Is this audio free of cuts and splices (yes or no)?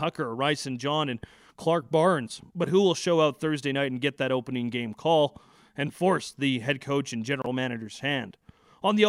yes